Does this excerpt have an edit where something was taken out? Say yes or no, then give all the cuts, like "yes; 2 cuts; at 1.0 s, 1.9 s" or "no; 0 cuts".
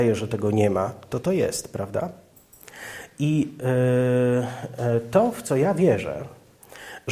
no; 0 cuts